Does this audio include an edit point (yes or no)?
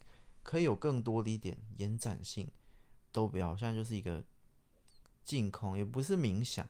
yes